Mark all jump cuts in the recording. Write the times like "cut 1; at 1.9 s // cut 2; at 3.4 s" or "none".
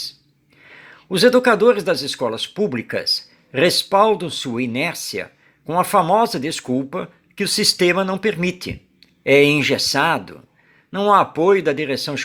none